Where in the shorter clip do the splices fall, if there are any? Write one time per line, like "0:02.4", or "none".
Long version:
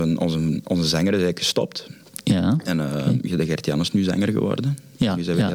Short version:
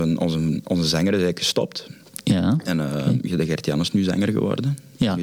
none